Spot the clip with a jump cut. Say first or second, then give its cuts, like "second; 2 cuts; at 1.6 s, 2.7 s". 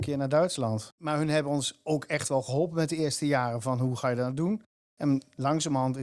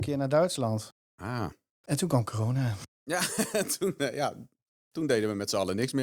first; 1 cut; at 1.0 s